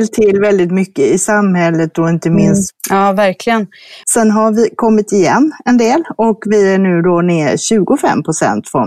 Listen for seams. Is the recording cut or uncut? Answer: cut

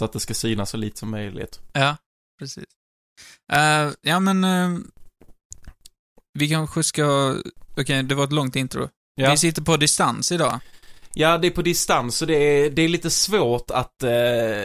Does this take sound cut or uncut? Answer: uncut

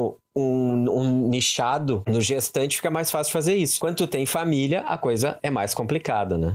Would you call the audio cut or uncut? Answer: uncut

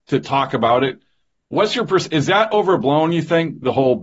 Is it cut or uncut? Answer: uncut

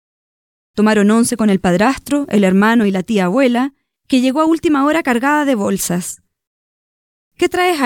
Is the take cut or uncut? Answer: uncut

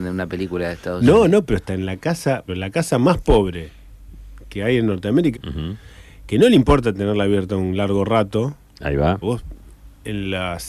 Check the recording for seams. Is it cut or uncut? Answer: cut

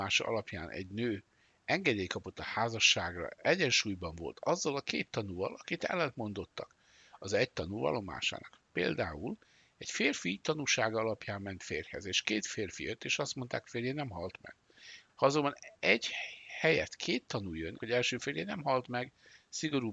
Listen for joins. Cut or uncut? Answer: cut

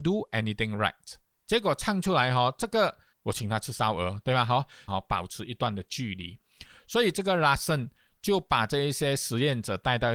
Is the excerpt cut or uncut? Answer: cut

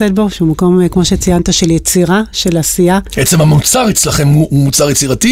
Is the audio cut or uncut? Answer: uncut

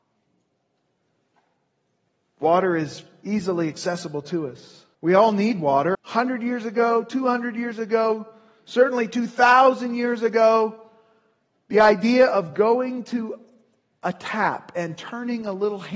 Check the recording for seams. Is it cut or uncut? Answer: cut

